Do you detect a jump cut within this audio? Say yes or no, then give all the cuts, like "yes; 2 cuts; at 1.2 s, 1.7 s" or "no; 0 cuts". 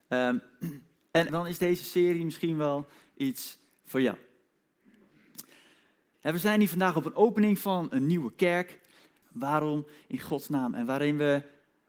yes; 3 cuts; at 1.3 s, 6.1 s, 9.2 s